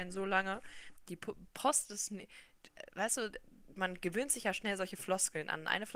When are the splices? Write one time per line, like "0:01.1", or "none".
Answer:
0:01.0